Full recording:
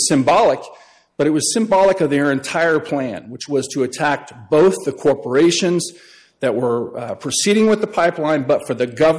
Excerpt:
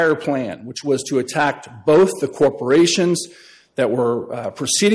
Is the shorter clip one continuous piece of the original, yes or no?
yes